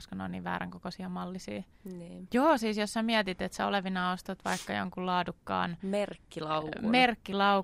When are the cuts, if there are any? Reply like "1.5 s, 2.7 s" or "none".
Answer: 2.3 s

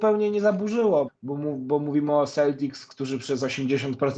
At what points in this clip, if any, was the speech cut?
1.1 s

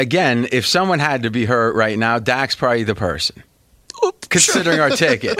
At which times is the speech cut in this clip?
none

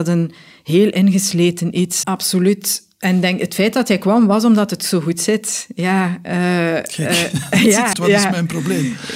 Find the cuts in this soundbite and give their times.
2.0 s, 7.9 s

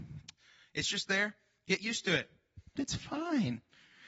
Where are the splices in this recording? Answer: 2.8 s

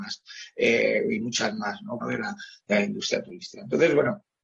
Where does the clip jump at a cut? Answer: 2.0 s

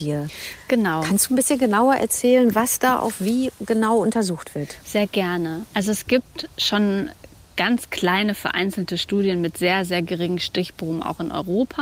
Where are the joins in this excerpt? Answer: none

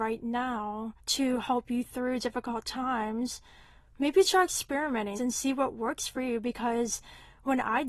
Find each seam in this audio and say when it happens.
1.0 s, 5.2 s

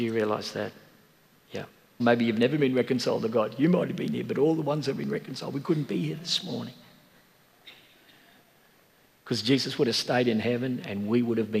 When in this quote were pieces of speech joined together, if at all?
2.0 s

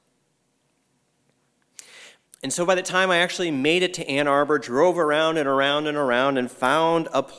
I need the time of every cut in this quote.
2.3 s

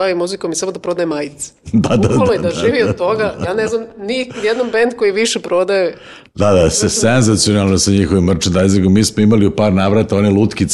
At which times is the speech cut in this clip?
none

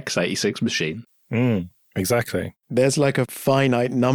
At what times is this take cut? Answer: none

